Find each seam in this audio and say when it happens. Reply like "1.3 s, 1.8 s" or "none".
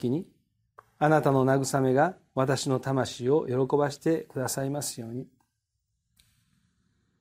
none